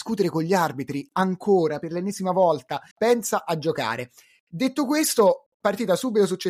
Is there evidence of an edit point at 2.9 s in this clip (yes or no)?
yes